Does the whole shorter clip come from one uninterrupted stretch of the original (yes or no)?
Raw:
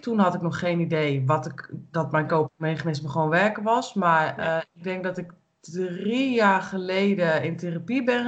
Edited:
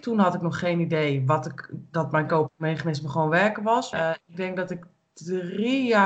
no